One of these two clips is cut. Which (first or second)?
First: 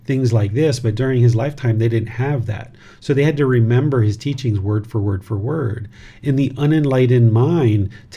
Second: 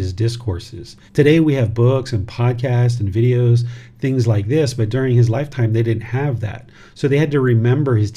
second